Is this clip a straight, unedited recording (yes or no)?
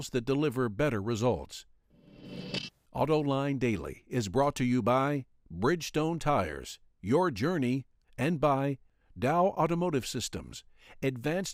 no